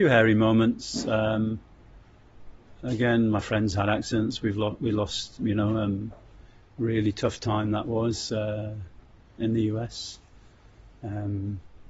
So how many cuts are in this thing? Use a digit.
2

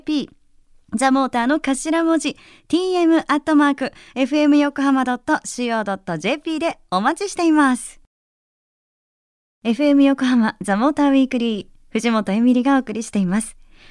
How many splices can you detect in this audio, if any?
0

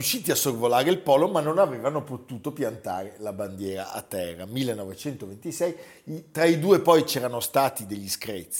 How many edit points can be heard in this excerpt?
0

